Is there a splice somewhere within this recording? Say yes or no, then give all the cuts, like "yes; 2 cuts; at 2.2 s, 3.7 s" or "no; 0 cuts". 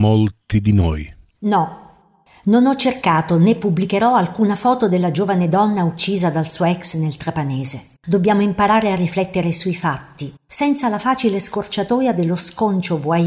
yes; 3 cuts; at 1.4 s, 8.0 s, 10.4 s